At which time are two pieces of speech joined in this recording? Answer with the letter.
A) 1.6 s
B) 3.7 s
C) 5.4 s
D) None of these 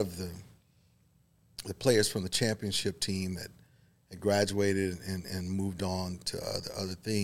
D